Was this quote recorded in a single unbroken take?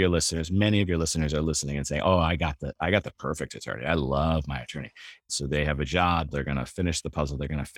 no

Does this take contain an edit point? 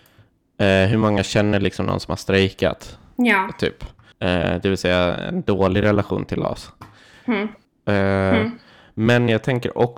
yes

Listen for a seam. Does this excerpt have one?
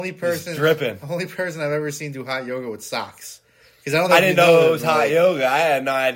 no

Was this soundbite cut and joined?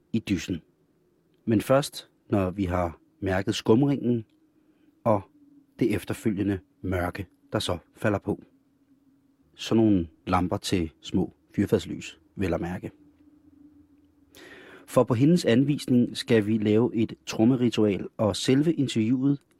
yes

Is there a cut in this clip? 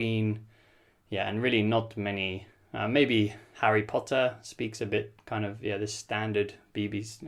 no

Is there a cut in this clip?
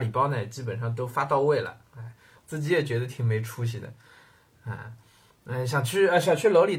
yes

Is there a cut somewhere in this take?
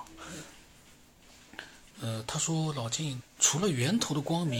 yes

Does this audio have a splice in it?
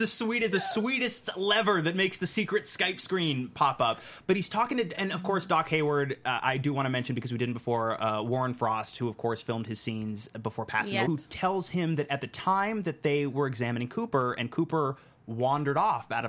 yes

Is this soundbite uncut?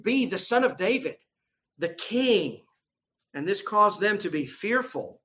no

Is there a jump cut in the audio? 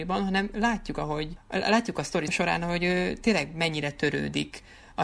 no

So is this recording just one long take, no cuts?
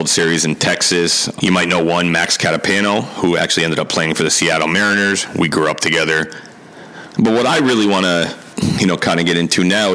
no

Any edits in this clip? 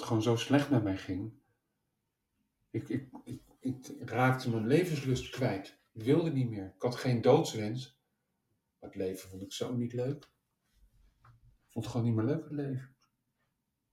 no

